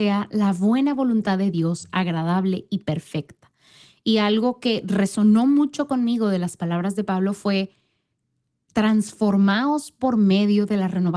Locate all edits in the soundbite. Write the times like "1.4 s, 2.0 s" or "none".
8.7 s